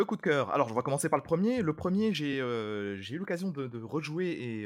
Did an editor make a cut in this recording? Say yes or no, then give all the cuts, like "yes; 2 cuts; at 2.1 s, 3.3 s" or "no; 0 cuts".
no; 0 cuts